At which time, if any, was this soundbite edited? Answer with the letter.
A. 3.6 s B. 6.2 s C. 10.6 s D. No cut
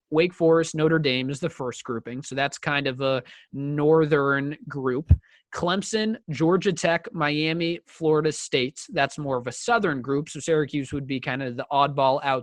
B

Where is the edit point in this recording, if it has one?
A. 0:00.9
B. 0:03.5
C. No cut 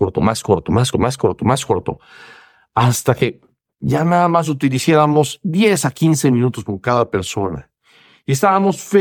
A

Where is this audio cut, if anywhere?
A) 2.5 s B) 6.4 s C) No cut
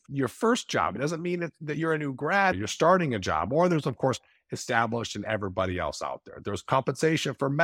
A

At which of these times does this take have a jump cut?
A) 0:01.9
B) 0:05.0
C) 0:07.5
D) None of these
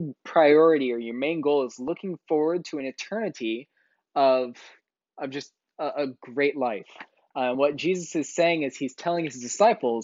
D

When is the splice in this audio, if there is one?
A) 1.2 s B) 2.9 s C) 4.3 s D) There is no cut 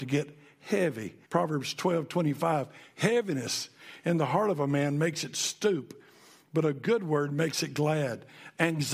A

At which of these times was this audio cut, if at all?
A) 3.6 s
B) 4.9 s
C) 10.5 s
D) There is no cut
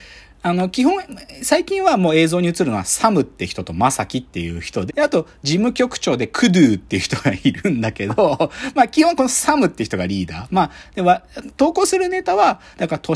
B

